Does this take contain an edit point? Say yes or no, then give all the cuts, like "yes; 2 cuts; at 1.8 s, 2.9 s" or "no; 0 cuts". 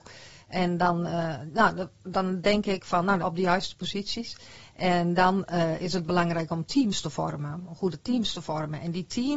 yes; 1 cut; at 3.2 s